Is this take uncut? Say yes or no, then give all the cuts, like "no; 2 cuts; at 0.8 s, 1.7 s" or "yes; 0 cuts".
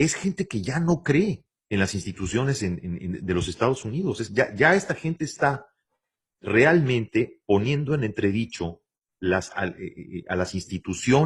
yes; 0 cuts